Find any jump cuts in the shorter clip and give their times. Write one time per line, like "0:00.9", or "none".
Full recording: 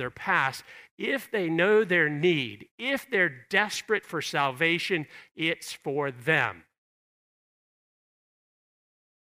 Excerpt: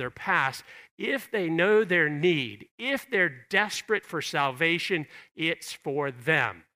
none